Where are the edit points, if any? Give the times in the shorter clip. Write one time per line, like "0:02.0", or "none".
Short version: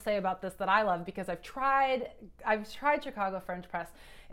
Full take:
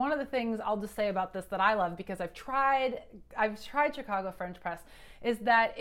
none